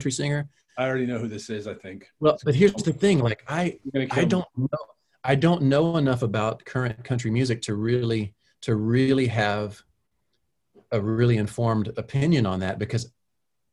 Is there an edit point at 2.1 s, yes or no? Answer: no